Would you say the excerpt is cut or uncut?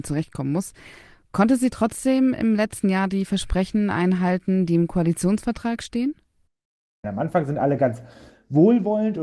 cut